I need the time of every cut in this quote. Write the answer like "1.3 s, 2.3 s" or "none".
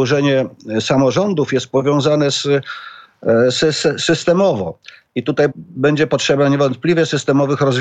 5.5 s